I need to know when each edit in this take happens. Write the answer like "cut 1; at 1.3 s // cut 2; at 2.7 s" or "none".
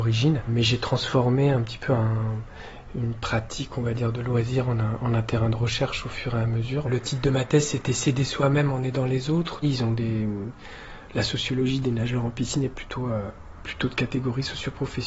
cut 1; at 9.6 s